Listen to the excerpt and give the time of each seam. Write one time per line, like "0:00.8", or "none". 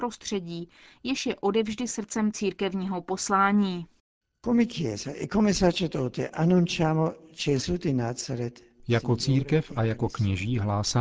none